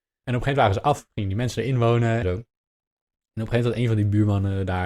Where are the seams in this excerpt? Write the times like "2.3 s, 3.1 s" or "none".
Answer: 2.2 s